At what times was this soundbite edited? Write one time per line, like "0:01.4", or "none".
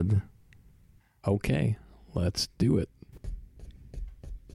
0:01.2